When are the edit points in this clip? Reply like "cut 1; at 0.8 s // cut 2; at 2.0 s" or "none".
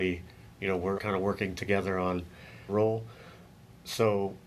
cut 1; at 1.0 s // cut 2; at 2.7 s

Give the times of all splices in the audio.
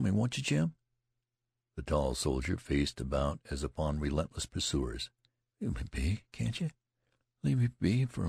cut 1; at 5.4 s

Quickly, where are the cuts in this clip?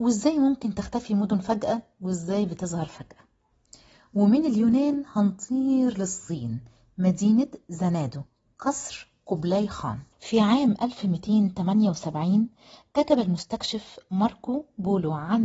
cut 1; at 10.1 s

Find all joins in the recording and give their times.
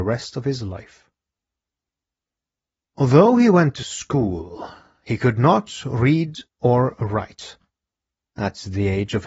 none

